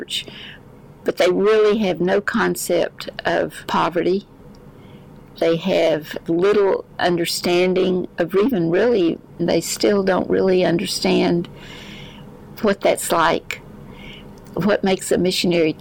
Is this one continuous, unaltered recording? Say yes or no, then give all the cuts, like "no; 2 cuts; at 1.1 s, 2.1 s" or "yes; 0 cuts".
no; 1 cut; at 9.4 s